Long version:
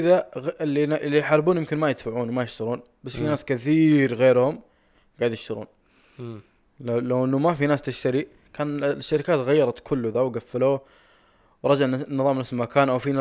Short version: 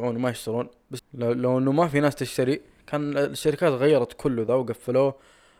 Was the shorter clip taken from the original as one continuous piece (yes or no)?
no